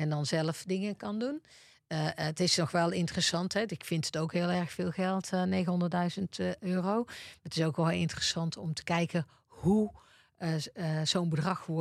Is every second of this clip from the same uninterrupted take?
yes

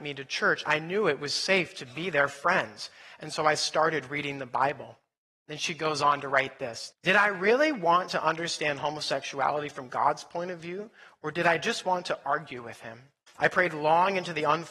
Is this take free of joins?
no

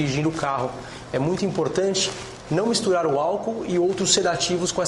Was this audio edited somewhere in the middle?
yes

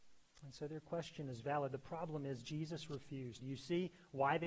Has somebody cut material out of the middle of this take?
yes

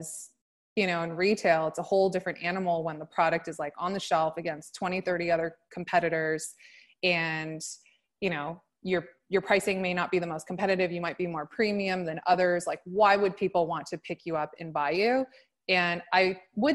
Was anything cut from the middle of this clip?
no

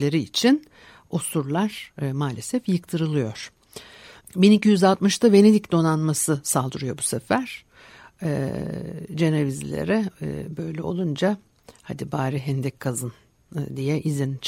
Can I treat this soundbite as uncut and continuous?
yes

